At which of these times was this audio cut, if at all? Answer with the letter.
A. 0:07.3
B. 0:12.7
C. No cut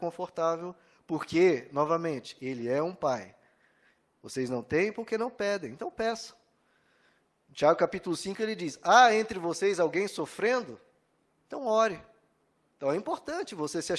B